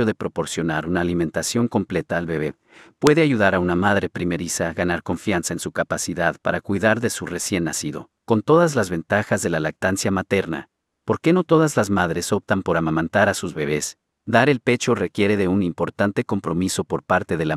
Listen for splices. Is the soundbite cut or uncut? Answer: cut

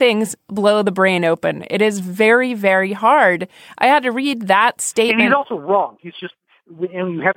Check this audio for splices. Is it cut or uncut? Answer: uncut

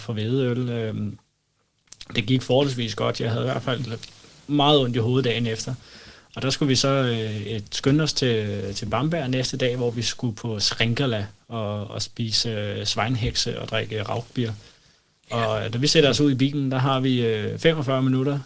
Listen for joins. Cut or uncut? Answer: uncut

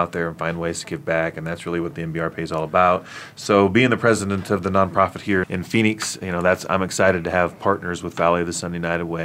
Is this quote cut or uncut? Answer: cut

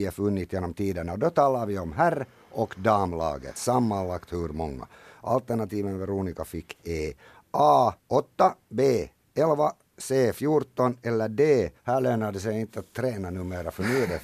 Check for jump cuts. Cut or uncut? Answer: cut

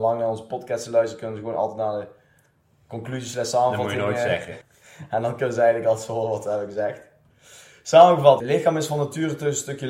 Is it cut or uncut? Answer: cut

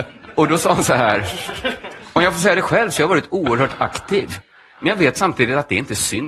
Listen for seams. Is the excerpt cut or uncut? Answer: uncut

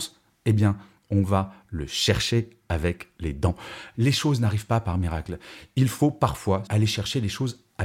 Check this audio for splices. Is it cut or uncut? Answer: cut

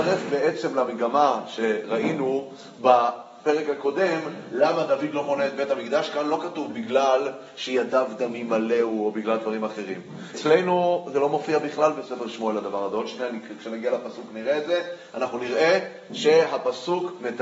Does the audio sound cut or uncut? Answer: cut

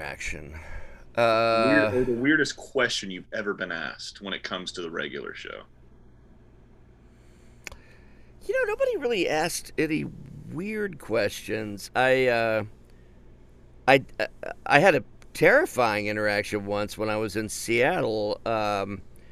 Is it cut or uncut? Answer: uncut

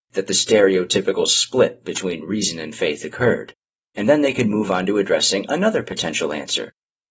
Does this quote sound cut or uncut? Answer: cut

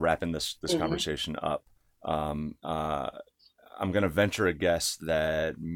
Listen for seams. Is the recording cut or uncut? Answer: uncut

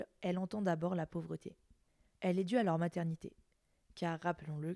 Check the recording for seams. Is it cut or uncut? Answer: uncut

